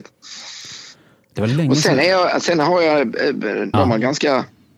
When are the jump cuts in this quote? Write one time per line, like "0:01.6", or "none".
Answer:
0:03.7

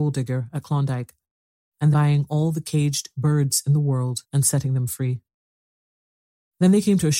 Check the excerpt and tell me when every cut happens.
0:01.9
0:04.2

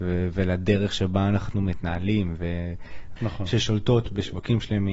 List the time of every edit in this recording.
0:03.2

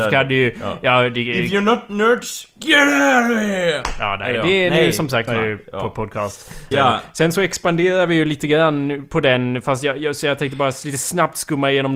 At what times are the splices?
0:05.3
0:06.7

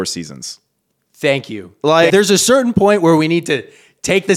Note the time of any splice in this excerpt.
0:02.1

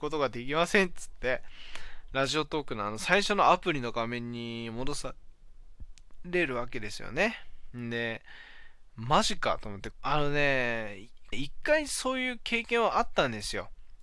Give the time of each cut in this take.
0:07.7
0:09.9
0:11.3

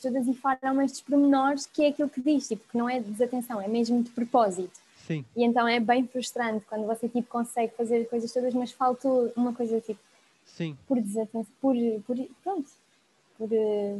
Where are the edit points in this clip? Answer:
none

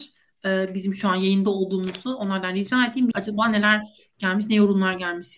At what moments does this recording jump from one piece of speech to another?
0:03.1

